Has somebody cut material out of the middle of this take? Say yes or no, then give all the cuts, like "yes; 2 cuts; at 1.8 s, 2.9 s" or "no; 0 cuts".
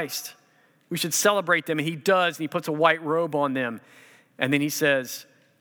no; 0 cuts